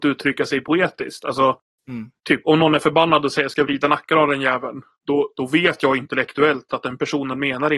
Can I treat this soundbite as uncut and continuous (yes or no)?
no